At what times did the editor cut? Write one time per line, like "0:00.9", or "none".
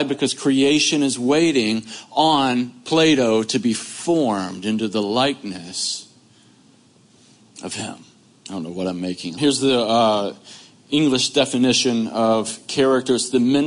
0:08.3
0:09.4